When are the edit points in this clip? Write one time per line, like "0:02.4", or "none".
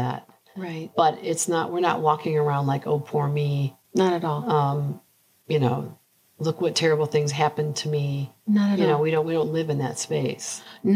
none